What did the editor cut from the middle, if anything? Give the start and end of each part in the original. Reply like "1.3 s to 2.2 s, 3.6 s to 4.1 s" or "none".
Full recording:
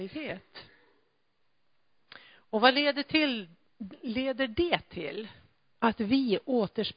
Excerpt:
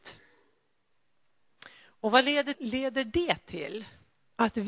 3.0 s to 4.0 s